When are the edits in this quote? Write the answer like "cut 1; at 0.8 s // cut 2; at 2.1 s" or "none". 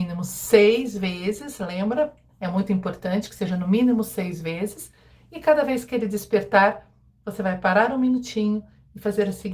none